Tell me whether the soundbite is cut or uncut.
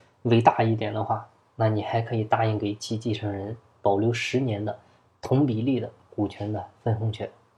uncut